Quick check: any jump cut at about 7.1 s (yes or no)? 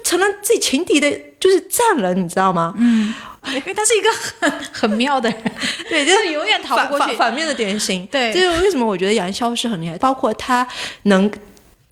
no